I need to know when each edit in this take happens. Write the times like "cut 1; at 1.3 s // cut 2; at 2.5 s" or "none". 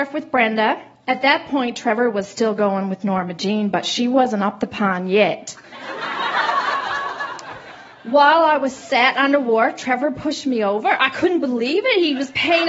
none